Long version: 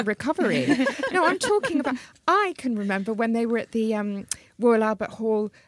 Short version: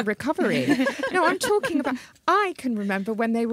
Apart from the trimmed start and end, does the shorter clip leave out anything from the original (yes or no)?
no